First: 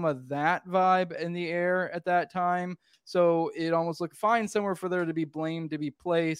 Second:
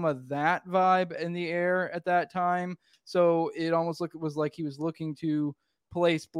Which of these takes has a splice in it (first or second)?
first